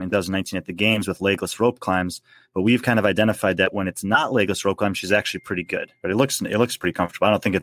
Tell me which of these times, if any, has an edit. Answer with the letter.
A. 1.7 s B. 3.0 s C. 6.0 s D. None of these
C